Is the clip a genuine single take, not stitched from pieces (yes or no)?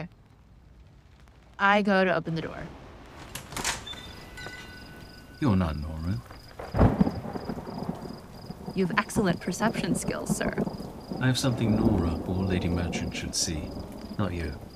yes